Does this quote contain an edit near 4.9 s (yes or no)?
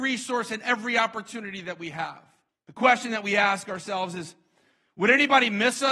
no